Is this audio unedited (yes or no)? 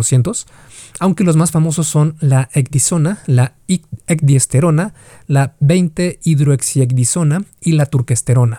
yes